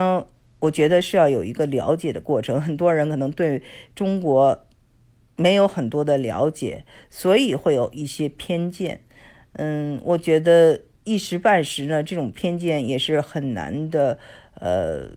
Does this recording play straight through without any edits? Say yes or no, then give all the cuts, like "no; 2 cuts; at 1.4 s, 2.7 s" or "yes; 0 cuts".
yes; 0 cuts